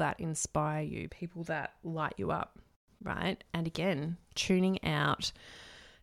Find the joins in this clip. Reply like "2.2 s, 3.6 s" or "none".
1.1 s